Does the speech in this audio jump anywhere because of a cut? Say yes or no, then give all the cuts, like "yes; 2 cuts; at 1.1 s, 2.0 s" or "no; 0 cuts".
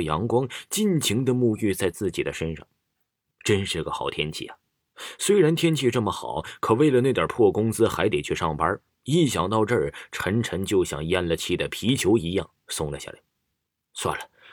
no; 0 cuts